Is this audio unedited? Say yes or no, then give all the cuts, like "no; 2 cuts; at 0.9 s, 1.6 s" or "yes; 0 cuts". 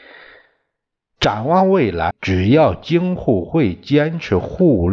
no; 1 cut; at 2.1 s